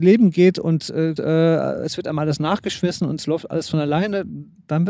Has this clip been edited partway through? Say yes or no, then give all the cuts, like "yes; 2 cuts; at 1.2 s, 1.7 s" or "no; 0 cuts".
yes; 1 cut; at 1.2 s